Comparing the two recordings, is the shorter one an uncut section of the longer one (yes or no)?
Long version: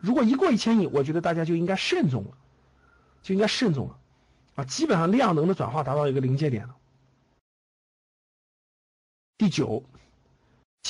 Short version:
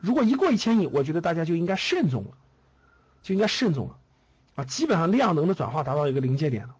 yes